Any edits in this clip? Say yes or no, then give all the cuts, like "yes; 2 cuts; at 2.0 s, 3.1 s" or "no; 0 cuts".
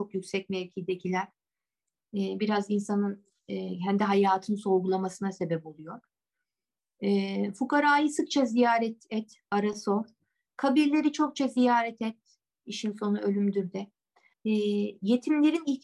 yes; 1 cut; at 14.3 s